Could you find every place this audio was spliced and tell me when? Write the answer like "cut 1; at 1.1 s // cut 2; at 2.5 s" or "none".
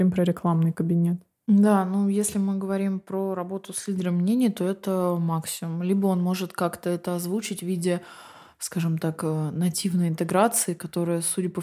none